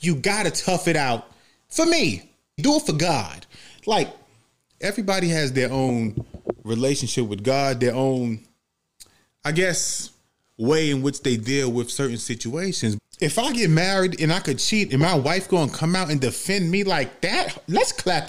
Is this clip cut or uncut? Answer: cut